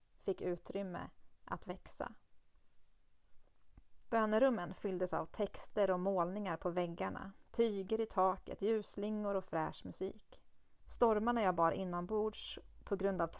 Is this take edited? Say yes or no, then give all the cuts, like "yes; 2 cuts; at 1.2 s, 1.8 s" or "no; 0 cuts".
yes; 2 cuts; at 4.0 s, 10.9 s